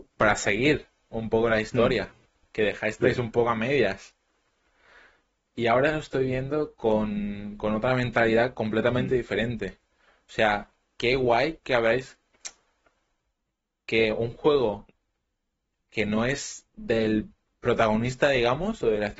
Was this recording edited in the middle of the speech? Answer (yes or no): no